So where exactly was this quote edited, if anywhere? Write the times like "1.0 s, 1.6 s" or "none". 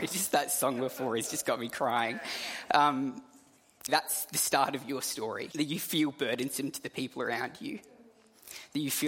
3.9 s, 5.5 s